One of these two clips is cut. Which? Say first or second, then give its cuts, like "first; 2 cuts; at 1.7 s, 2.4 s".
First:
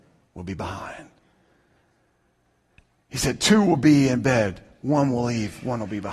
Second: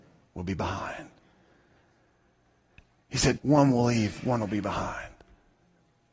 second; 1 cut; at 3.4 s